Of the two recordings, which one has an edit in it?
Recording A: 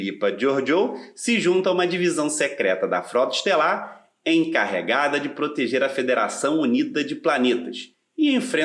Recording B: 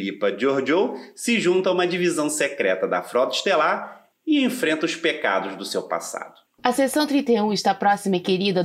B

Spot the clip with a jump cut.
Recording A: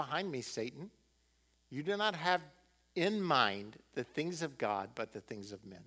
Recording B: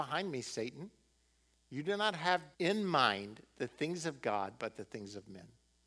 B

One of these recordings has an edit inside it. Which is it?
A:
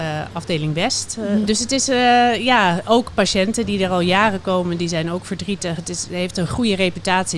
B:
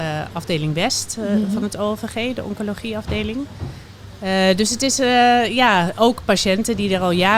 A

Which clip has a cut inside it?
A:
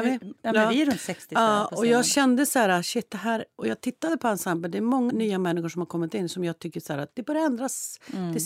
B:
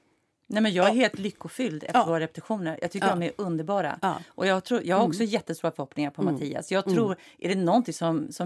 A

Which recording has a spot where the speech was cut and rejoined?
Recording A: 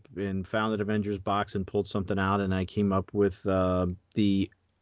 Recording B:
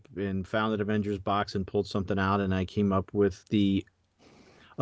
B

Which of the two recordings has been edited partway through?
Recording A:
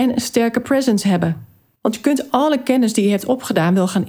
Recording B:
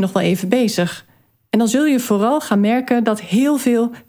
A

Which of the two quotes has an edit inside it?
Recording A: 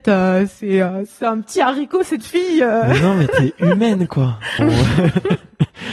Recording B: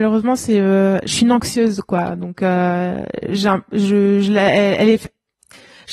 A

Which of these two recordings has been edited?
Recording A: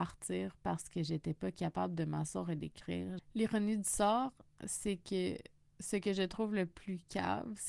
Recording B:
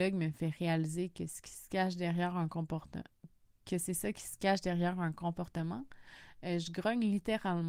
A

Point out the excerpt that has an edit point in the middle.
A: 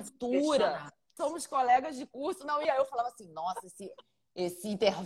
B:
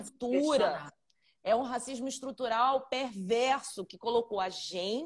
A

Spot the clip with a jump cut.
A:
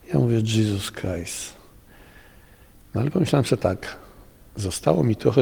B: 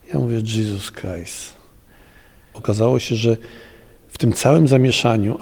B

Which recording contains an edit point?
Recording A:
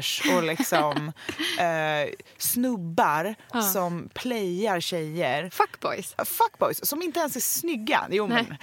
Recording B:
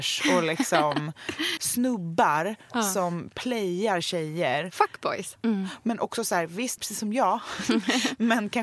B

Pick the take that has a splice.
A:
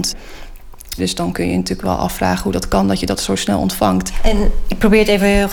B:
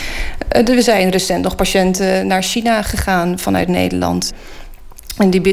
A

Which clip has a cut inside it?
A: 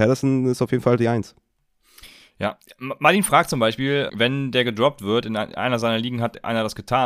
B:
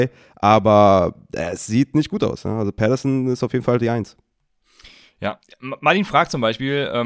A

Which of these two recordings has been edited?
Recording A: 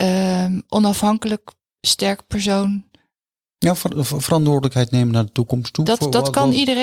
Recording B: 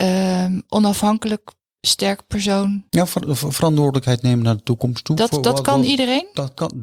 B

